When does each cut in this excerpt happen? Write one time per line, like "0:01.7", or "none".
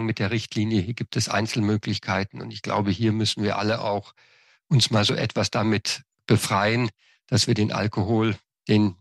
none